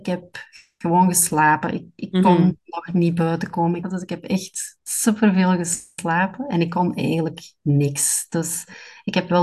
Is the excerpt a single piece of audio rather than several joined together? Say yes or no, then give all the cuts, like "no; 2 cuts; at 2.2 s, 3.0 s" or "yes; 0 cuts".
no; 1 cut; at 3.8 s